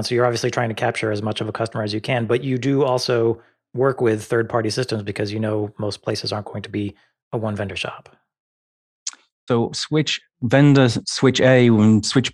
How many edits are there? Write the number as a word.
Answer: two